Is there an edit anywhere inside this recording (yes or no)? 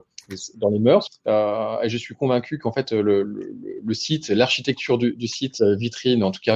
yes